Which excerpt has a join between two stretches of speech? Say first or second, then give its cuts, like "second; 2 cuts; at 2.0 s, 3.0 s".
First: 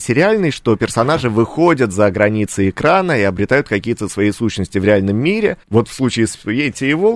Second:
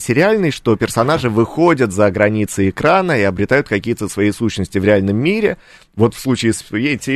first; 1 cut; at 5.6 s